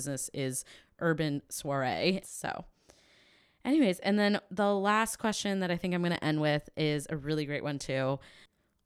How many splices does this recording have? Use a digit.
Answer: 1